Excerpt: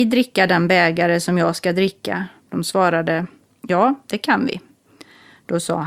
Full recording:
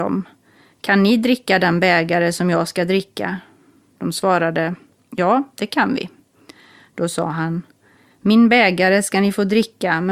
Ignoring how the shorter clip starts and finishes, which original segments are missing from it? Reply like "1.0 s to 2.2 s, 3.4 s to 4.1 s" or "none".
3.5 s to 3.9 s

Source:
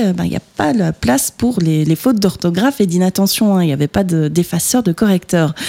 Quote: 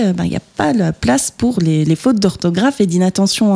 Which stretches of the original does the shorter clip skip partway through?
none

